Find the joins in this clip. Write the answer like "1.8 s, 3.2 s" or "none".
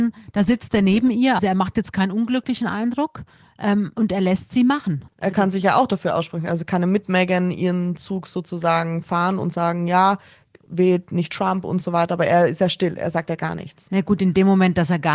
1.4 s